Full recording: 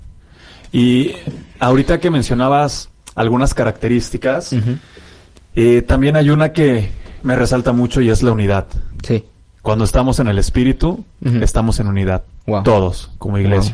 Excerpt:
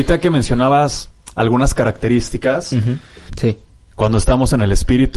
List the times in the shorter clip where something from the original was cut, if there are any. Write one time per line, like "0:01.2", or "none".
0:03.3